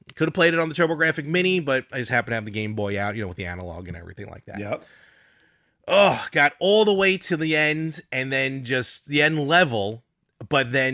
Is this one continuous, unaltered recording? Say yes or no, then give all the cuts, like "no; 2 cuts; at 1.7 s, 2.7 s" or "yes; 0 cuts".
yes; 0 cuts